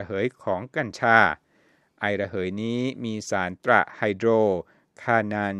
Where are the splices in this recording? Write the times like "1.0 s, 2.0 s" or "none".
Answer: 3.6 s